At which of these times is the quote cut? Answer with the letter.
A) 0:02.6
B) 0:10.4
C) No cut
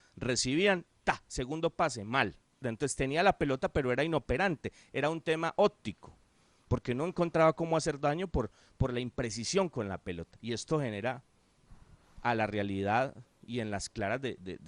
A